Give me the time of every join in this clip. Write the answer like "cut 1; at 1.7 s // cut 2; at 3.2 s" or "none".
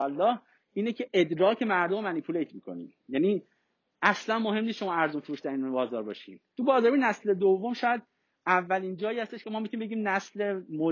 cut 1; at 6.6 s